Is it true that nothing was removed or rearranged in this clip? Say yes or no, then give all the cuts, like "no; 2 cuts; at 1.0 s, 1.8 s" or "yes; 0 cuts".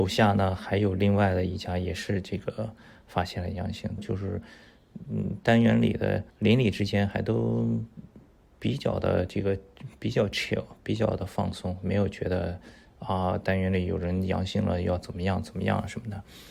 no; 2 cuts; at 4.0 s, 6.3 s